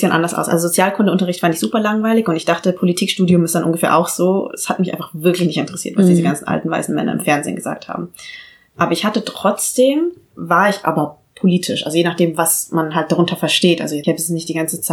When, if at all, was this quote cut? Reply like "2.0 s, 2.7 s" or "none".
none

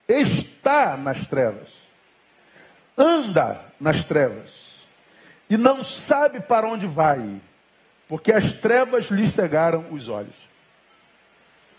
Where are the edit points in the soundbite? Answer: none

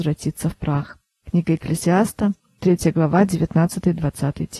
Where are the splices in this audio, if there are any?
none

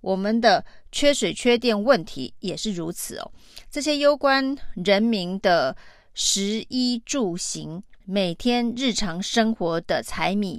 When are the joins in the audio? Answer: 8.0 s

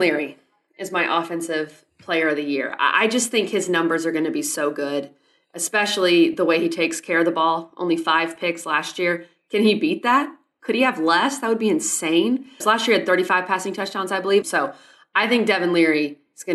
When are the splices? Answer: 12.6 s, 14.4 s

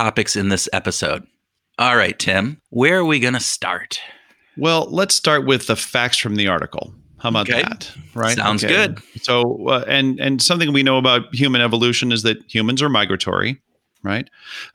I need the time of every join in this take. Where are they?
2.7 s

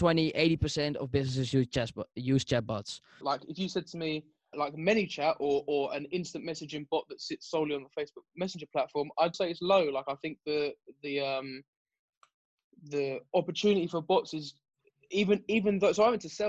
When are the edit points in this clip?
3.2 s, 4.5 s, 9.3 s

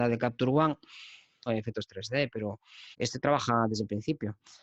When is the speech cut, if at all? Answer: 1.5 s, 2.9 s

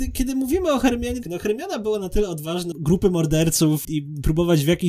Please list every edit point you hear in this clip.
1.2 s, 2.7 s, 3.8 s

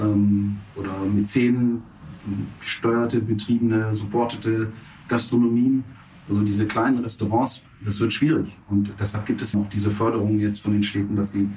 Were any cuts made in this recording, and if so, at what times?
9.5 s

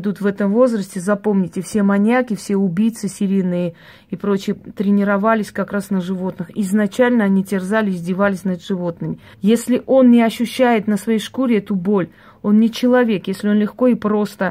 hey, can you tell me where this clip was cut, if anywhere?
4.5 s, 9.3 s

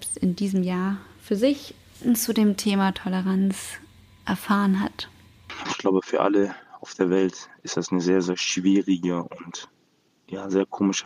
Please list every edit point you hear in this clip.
5.6 s

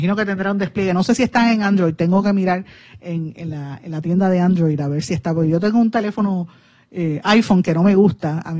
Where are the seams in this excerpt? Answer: none

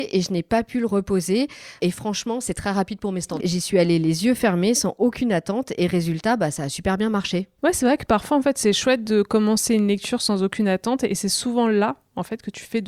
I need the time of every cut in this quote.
1.8 s, 3.4 s

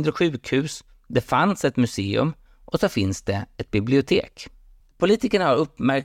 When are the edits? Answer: 2.5 s, 4.9 s

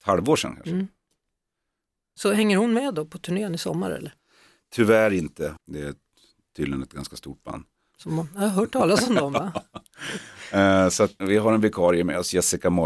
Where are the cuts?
5.6 s, 11.2 s

